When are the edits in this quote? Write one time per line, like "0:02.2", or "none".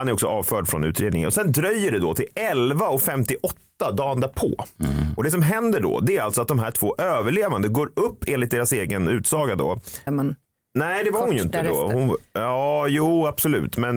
0:04.8
0:10.1